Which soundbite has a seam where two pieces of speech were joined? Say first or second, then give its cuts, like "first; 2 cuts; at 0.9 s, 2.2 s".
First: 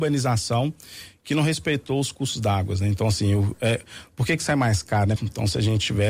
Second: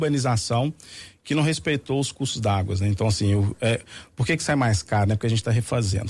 first; 1 cut; at 5.2 s